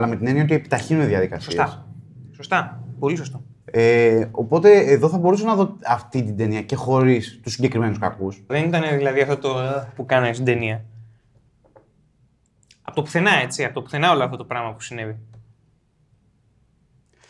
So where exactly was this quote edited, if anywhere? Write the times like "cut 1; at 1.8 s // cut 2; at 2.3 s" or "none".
cut 1; at 8.5 s